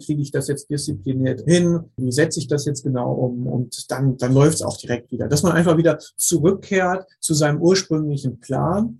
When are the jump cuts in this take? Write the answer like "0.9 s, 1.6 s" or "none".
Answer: none